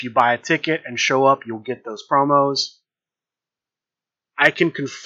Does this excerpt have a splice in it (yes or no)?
no